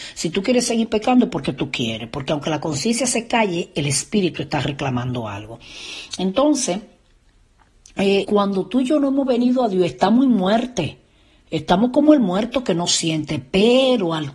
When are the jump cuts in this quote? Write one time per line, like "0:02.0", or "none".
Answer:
0:08.2